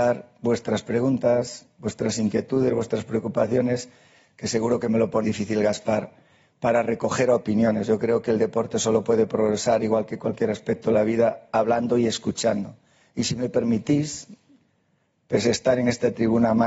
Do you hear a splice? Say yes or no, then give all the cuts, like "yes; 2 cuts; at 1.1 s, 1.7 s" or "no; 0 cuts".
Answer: yes; 1 cut; at 5.2 s